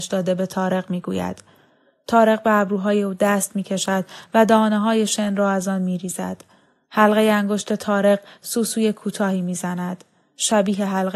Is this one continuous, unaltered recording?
yes; 0 cuts

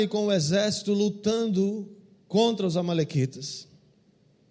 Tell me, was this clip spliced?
no; 0 cuts

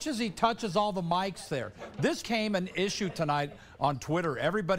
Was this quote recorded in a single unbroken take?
no; 1 cut; at 2.2 s

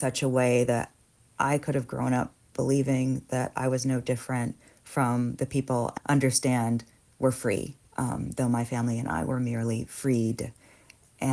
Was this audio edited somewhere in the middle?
yes; 2 cuts; at 6.0 s, 7.9 s

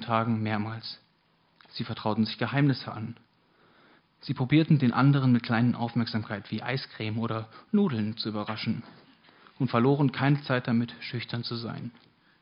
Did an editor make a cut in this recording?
no; 0 cuts

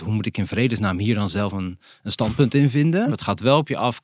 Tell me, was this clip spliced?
yes; 1 cut; at 3.1 s

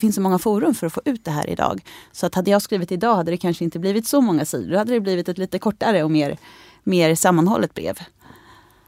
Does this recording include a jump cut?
no; 0 cuts

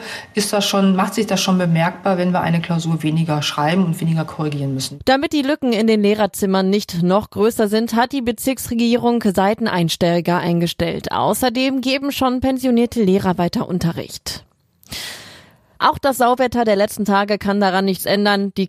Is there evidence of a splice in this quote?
no; 0 cuts

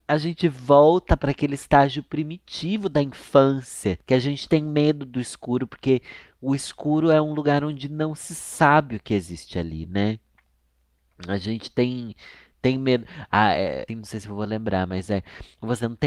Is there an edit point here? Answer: yes; 1 cut; at 13.9 s

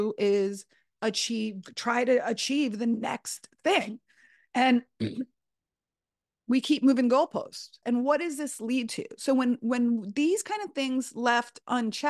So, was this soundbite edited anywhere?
yes; 1 cut; at 7.8 s

